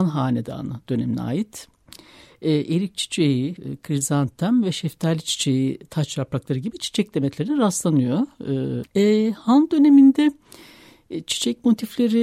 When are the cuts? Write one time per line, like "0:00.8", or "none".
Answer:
0:03.6
0:08.8